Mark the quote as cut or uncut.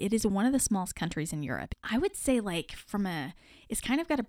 cut